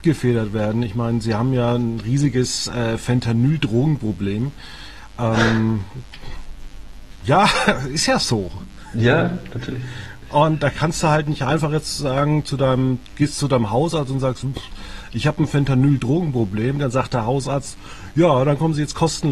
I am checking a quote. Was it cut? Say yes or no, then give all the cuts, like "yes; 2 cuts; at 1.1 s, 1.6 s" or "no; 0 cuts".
no; 0 cuts